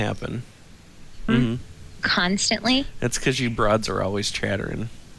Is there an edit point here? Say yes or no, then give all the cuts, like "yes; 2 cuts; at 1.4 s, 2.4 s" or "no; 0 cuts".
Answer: yes; 1 cut; at 1.3 s